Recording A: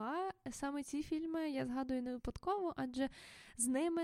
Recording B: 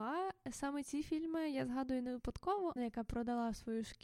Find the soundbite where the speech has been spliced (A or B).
B